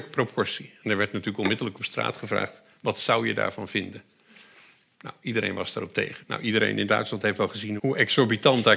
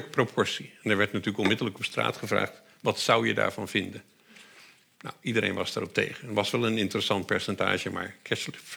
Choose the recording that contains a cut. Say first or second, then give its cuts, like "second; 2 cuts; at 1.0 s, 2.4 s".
first; 2 cuts; at 6.2 s, 7.8 s